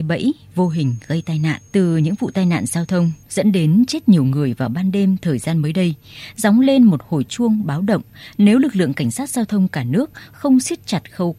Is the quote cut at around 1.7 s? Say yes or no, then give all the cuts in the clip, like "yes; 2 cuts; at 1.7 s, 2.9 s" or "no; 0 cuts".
yes; 1 cut; at 1.7 s